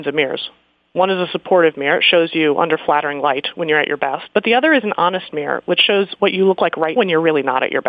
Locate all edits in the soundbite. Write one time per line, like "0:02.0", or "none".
0:04.3
0:07.0